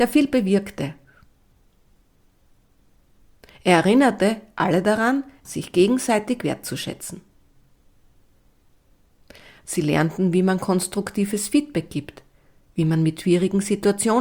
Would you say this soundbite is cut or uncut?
cut